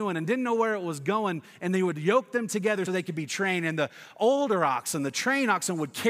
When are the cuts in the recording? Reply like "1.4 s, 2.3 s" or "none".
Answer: 2.9 s